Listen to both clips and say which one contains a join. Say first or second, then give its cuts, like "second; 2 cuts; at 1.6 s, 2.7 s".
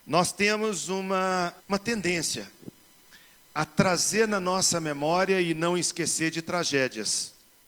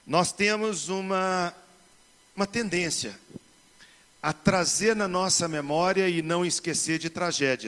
first; 1 cut; at 1.6 s